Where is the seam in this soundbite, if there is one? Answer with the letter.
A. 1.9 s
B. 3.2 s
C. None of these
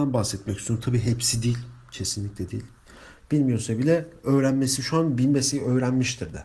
B